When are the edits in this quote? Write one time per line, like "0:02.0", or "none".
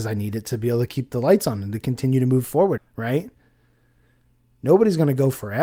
0:02.8